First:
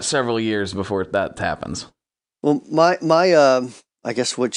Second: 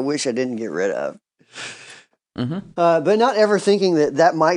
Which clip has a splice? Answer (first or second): second